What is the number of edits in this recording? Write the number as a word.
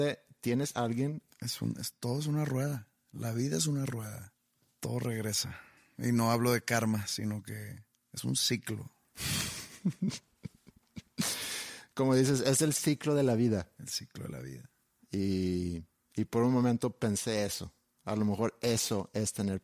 zero